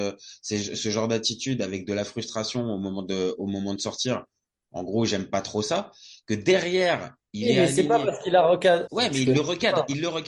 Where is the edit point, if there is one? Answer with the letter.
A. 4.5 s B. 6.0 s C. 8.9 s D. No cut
C